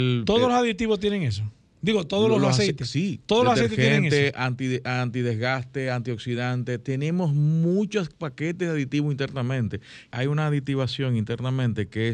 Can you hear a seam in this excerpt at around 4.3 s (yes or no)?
no